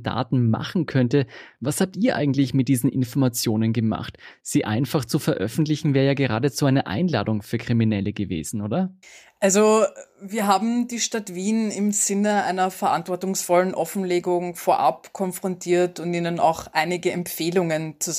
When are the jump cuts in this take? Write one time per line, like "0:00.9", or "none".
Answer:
none